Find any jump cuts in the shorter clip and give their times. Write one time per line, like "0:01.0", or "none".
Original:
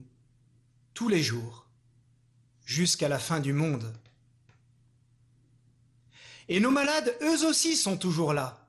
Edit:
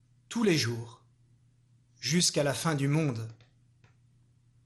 none